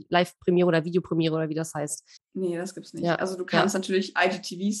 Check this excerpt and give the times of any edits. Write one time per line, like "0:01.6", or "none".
0:02.2